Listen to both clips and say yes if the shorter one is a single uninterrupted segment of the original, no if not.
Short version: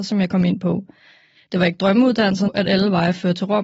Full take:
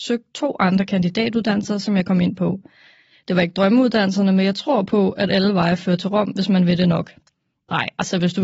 no